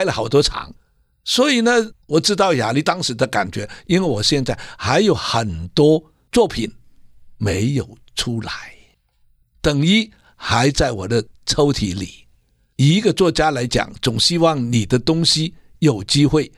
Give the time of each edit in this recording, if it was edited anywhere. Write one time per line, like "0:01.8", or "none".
0:02.0